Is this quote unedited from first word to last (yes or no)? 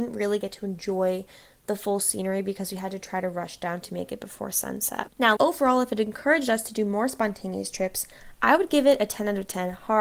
no